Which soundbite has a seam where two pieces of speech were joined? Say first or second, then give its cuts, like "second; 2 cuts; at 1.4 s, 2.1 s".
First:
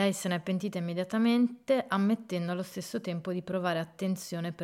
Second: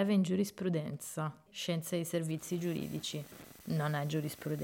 second; 1 cut; at 1.5 s